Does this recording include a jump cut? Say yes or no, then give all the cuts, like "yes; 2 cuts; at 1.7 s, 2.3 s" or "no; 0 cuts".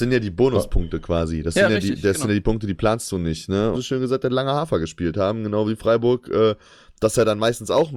yes; 1 cut; at 3.7 s